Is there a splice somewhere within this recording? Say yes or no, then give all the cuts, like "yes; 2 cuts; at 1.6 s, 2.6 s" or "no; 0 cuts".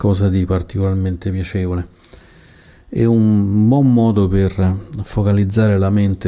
no; 0 cuts